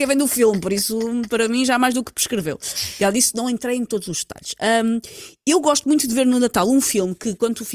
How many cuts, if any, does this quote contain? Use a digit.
0